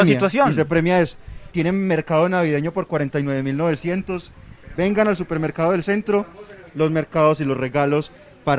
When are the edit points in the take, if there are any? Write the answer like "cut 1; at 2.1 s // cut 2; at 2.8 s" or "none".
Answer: cut 1; at 1.5 s // cut 2; at 4.8 s // cut 3; at 6.6 s